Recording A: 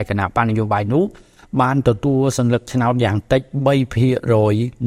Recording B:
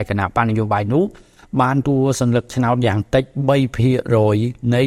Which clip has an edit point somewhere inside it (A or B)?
B